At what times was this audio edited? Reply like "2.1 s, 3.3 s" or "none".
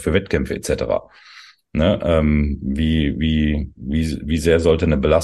none